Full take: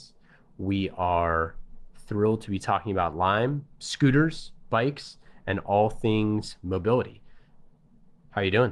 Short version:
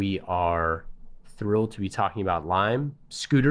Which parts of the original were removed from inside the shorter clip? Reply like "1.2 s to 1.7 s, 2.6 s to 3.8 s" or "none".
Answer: none